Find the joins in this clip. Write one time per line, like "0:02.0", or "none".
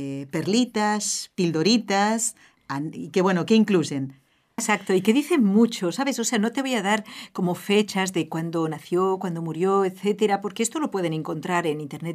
0:04.6